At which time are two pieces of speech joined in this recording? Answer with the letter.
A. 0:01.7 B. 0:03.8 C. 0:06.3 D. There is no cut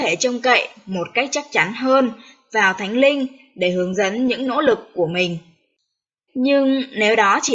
C